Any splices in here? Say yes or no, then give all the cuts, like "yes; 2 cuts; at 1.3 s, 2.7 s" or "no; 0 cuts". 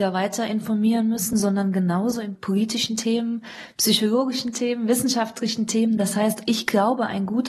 no; 0 cuts